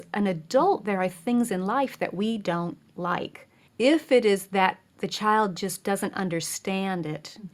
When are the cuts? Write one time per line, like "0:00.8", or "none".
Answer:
0:03.7